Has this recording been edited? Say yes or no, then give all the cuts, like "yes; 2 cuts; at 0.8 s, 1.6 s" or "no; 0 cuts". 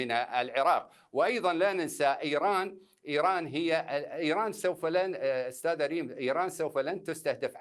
no; 0 cuts